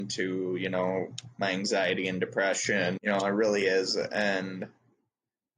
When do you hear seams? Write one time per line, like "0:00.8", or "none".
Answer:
0:03.0